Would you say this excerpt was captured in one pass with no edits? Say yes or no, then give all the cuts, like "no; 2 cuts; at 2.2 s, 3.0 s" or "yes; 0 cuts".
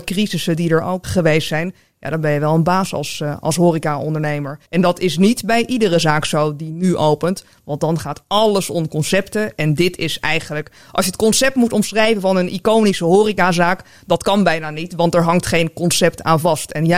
no; 2 cuts; at 1.0 s, 4.7 s